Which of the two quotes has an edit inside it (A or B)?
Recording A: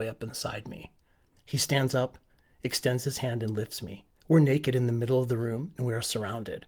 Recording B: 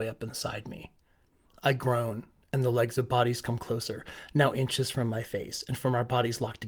A